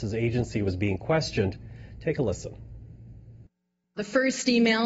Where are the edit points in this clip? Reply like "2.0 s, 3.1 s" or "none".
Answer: none